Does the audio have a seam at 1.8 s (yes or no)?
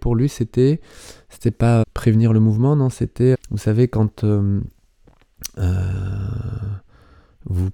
yes